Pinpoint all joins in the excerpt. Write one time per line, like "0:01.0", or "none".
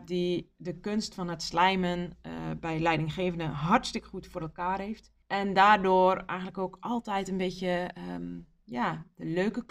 0:05.2